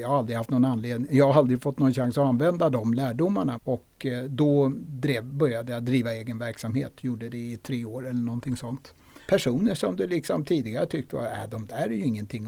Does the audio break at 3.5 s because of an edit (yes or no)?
yes